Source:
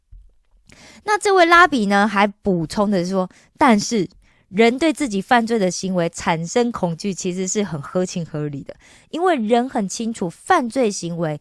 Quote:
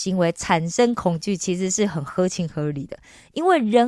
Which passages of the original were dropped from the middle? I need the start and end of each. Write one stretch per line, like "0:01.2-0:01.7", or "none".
none